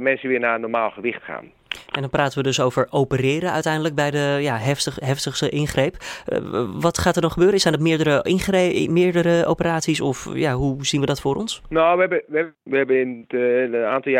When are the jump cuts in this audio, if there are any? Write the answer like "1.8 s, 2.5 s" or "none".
12.7 s